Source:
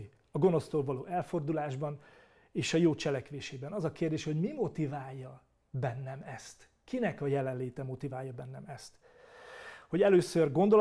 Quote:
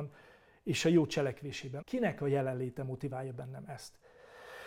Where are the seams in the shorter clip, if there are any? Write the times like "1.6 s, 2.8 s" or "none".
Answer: 1.8 s